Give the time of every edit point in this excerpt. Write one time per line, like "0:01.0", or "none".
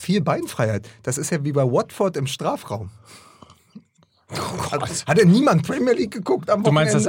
none